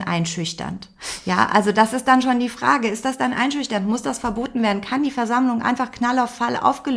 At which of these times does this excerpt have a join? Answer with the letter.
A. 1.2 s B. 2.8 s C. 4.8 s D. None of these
D